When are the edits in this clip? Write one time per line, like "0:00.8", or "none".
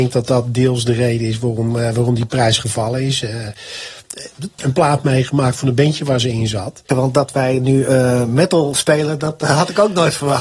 0:04.6
0:06.9